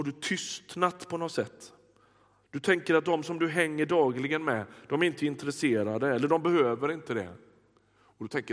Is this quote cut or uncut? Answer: uncut